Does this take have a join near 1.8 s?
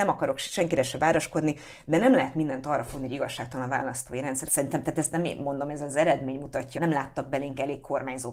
no; 2 cuts; at 4.5 s, 6.8 s

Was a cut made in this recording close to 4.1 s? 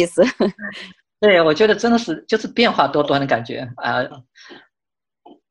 yes; 1 cut; at 4.1 s

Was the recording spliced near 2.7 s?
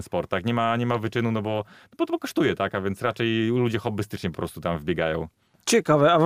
no; 0 cuts

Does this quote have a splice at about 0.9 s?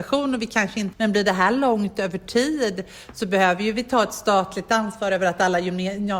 yes; 1 cut; at 0.9 s

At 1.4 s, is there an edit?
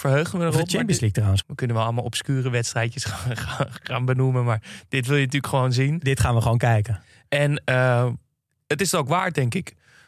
yes; 1 cut; at 1.4 s

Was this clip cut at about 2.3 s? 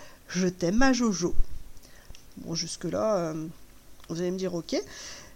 yes; 1 cut; at 2.3 s

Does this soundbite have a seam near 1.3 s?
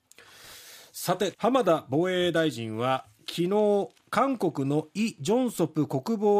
yes; 1 cut; at 1.3 s

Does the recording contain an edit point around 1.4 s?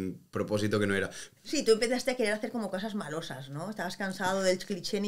yes; 1 cut; at 1.4 s

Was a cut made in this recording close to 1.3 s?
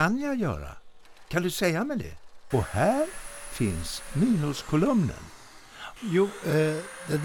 no; 2 cuts; at 2.5 s, 6.0 s

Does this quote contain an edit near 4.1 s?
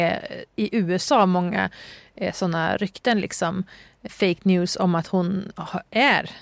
yes; 1 cut; at 4.1 s

